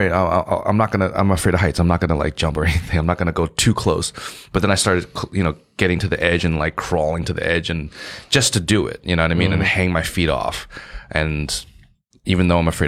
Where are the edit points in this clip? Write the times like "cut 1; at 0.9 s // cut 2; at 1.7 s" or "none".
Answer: none

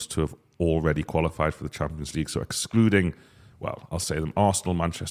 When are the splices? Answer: none

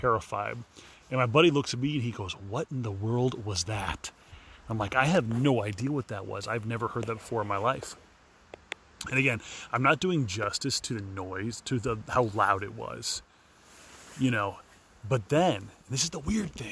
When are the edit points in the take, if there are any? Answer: none

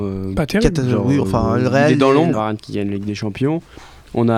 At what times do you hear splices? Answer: cut 1; at 2.3 s

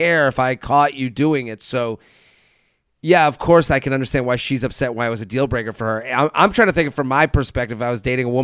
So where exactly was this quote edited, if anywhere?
none

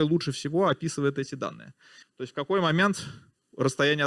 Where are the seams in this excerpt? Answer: cut 1; at 2.0 s

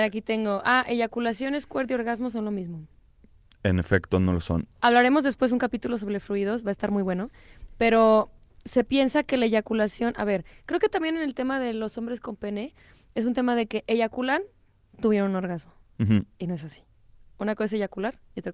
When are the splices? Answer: none

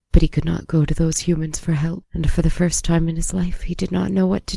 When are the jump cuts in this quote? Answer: cut 1; at 2.0 s

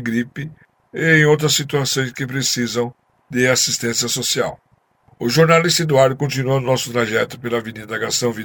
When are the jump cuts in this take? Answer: none

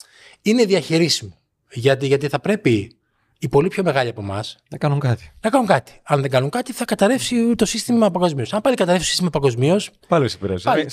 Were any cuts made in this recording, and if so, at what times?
none

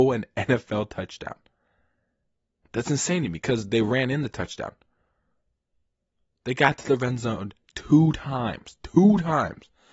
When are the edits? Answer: none

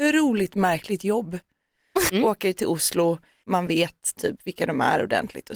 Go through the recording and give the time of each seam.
cut 1; at 2.1 s // cut 2; at 3.4 s

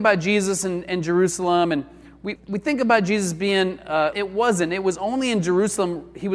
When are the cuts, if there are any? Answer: cut 1; at 2.4 s // cut 2; at 4.1 s

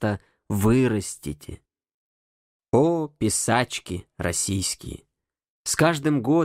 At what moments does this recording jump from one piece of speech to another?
cut 1; at 2.6 s

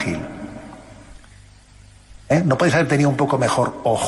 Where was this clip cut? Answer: cut 1; at 2.2 s

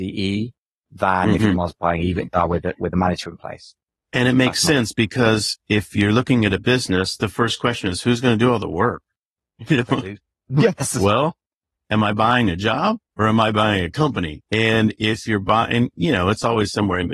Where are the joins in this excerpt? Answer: cut 1; at 14.5 s

